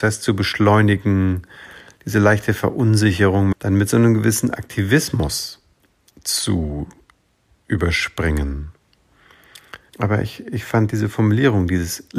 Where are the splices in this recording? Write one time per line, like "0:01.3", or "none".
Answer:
0:03.5
0:09.9

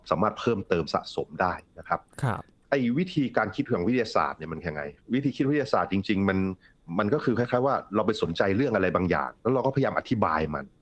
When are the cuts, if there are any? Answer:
0:05.0
0:09.4

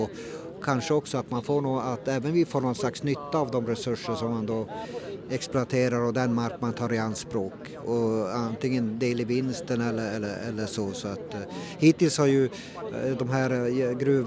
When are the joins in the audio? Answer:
none

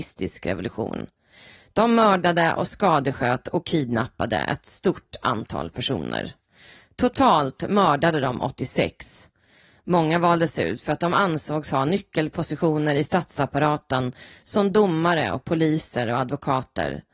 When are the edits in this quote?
none

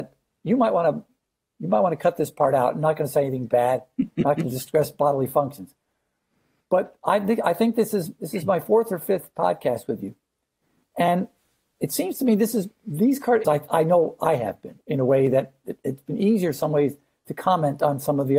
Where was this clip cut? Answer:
0:13.4

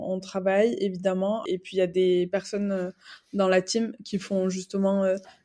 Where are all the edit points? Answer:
0:01.5

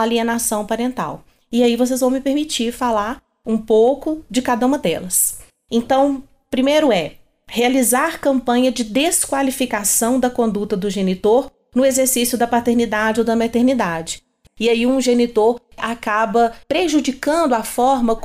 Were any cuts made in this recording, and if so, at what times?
0:14.5
0:16.6

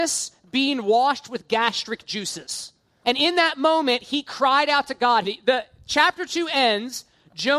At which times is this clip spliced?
0:03.0
0:05.2

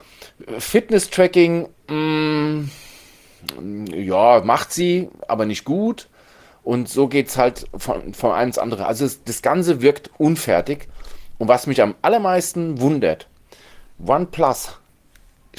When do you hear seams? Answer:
none

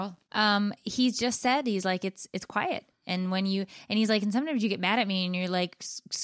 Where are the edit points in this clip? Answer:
none

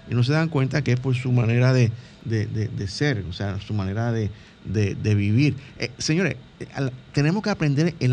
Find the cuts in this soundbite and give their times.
0:07.1

